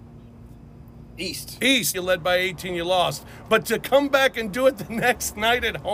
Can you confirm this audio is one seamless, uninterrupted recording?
no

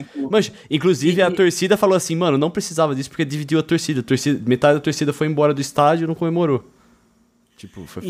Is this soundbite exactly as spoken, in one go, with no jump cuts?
yes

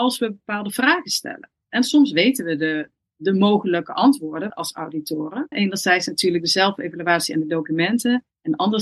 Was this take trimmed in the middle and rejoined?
yes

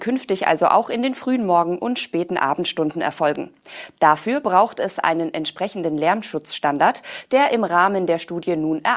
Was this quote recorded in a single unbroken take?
yes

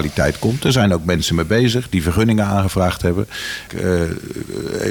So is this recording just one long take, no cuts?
no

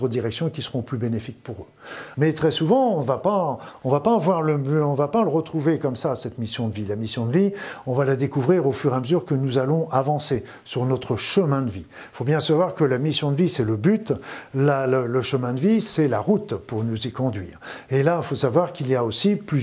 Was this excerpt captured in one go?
no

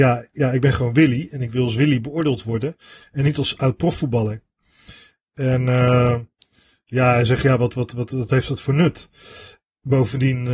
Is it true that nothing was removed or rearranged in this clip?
yes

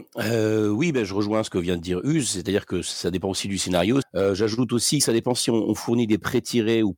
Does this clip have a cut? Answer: yes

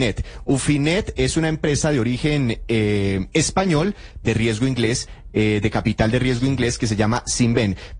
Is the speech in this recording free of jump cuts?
no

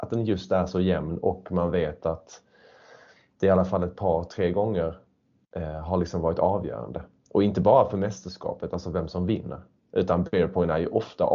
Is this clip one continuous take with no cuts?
yes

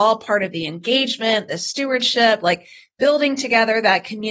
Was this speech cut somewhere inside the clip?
no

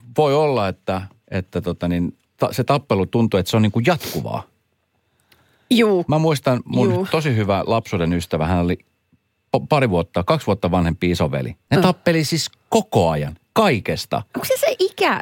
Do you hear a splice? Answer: yes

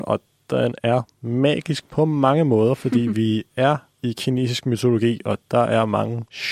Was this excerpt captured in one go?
yes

